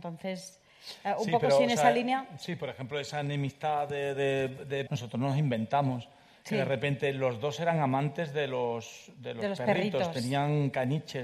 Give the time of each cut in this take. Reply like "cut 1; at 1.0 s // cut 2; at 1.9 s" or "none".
cut 1; at 4.9 s